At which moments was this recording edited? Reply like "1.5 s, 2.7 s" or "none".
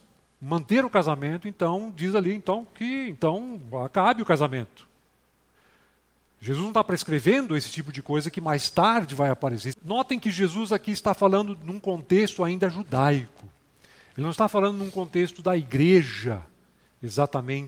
9.7 s